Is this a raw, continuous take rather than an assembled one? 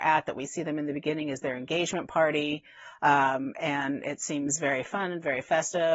yes; 0 cuts

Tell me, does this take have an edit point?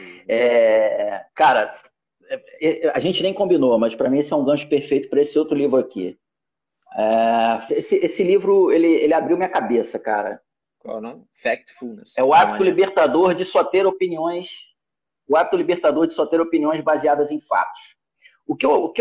yes; 1 cut; at 7.7 s

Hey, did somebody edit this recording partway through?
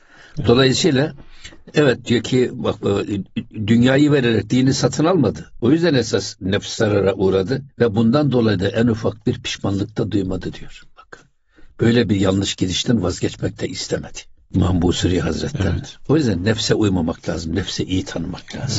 no; 0 cuts

